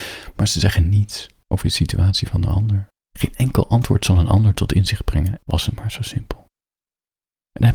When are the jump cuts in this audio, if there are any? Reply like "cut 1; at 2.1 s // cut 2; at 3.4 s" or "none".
cut 1; at 3.1 s // cut 2; at 5.4 s